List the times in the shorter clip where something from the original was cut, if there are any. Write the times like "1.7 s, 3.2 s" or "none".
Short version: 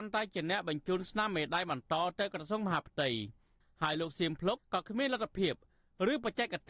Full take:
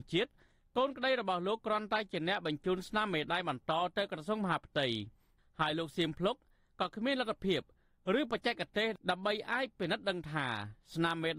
4.6 s